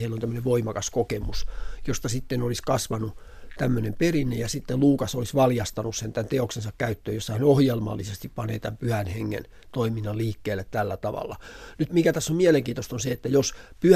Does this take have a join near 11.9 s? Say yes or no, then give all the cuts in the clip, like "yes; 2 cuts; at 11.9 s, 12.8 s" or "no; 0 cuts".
yes; 1 cut; at 11.9 s